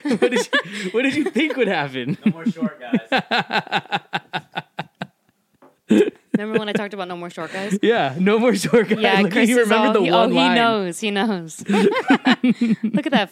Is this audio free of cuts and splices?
yes; 0 cuts

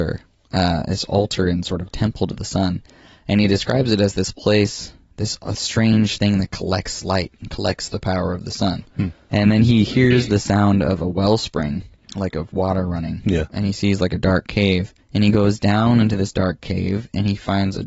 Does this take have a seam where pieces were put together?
no; 0 cuts

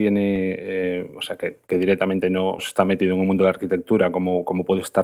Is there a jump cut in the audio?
yes; 1 cut; at 2.6 s

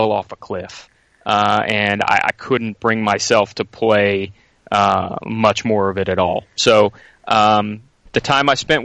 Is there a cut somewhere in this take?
no; 0 cuts

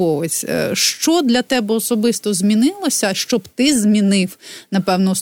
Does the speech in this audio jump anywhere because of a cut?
no; 0 cuts

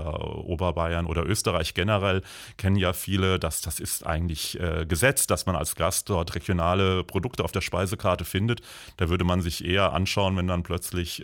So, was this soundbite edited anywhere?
no; 0 cuts

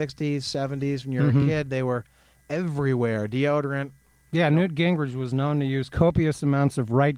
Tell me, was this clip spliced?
no; 0 cuts

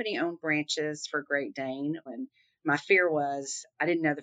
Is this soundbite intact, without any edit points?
no; 1 cut; at 2.1 s

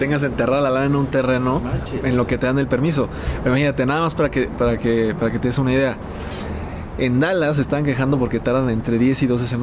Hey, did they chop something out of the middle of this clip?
no; 0 cuts

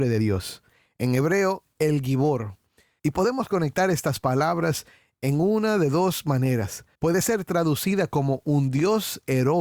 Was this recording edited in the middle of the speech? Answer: yes; 2 cuts; at 3.0 s, 6.9 s

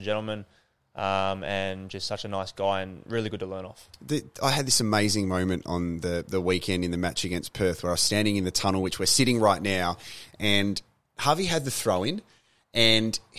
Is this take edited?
no; 0 cuts

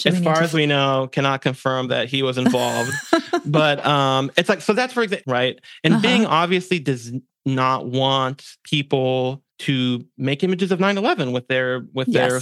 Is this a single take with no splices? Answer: no; 2 cuts; at 5.2 s, 9.5 s

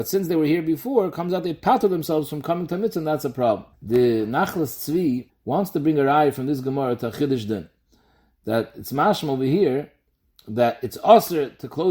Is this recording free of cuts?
no; 2 cuts; at 3.7 s, 5.3 s

